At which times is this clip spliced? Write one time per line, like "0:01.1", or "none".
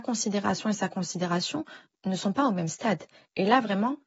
none